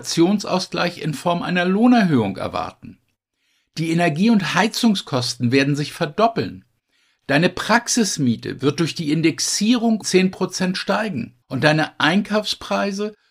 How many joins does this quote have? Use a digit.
2